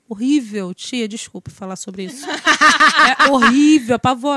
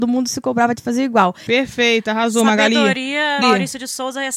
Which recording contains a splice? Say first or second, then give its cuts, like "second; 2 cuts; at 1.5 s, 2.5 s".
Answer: second; 2 cuts; at 1.5 s, 3.4 s